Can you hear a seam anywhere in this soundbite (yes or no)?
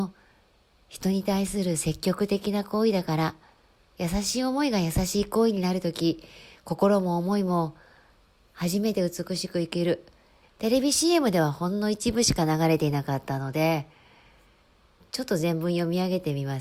yes